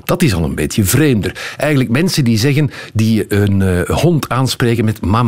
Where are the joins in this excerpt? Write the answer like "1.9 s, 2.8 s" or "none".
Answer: none